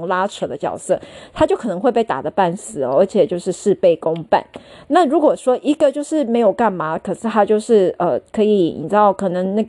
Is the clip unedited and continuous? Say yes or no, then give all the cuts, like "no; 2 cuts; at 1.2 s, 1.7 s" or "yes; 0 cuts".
yes; 0 cuts